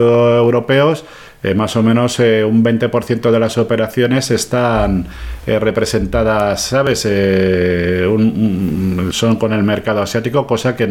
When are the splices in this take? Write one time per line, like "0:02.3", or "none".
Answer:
0:09.1